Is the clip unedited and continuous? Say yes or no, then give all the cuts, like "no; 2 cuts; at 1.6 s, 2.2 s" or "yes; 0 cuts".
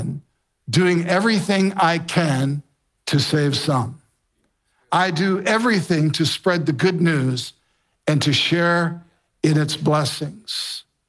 yes; 0 cuts